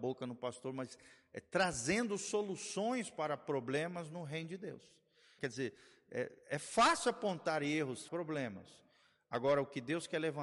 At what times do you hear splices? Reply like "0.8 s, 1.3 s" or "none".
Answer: 5.4 s, 8.1 s

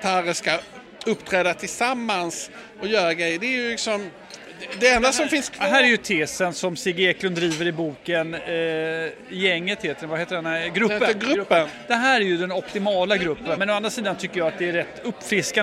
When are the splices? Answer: 13.6 s

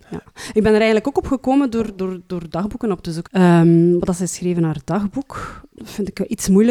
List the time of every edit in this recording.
3.3 s, 5.7 s

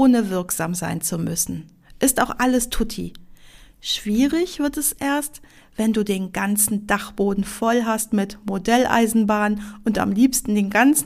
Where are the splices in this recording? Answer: none

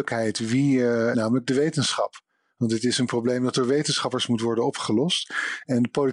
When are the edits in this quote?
1.1 s

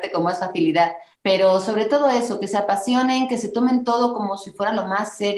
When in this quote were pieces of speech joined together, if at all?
1.1 s

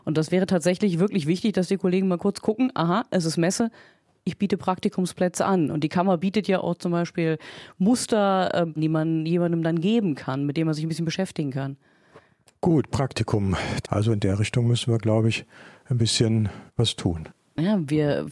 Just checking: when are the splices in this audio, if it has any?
8.8 s, 13.8 s, 16.7 s

